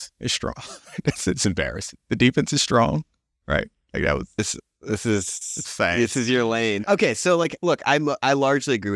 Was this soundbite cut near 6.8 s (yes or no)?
yes